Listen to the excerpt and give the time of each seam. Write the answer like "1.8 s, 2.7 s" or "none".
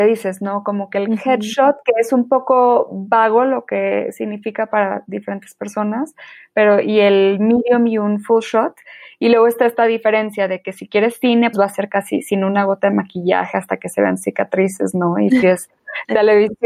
11.5 s